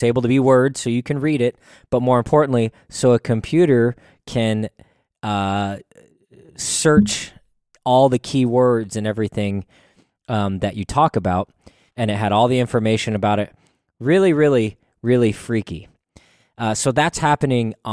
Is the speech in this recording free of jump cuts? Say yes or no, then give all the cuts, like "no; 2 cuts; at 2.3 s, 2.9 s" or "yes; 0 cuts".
no; 1 cut; at 11.9 s